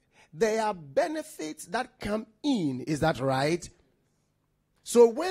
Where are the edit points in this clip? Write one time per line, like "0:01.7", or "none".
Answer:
none